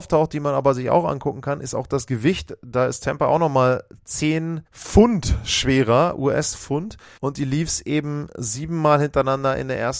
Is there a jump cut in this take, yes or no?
yes